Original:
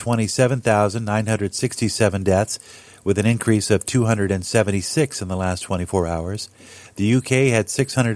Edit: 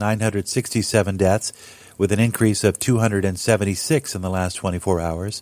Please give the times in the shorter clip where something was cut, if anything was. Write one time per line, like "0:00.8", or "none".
none

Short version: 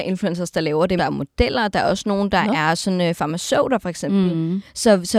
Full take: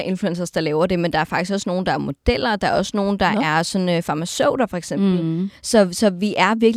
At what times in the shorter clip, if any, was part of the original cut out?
0:01.0

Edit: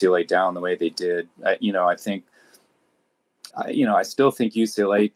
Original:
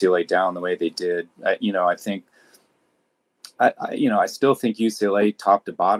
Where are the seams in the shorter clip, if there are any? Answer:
0:03.5

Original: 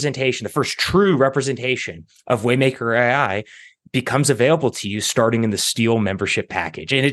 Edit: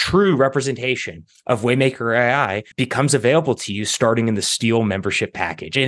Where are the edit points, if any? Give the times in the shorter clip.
0:02.7

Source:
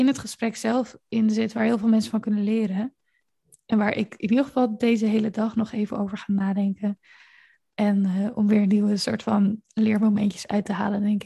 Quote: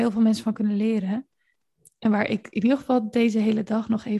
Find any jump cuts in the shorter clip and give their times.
none

